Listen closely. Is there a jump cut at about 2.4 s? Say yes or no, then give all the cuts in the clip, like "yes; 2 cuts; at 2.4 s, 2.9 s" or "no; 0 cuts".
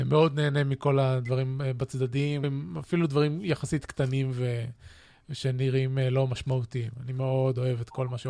yes; 1 cut; at 2.4 s